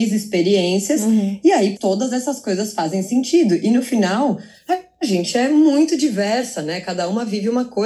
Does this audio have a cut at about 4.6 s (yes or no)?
no